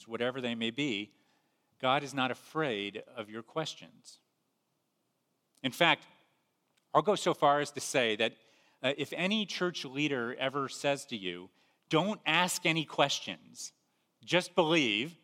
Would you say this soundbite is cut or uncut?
uncut